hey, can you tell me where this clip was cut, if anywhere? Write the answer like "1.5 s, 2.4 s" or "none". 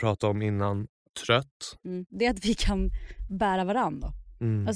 2.1 s